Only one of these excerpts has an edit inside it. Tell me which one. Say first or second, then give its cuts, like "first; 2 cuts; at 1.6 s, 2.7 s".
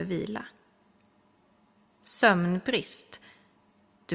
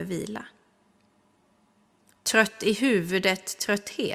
first; 1 cut; at 1.9 s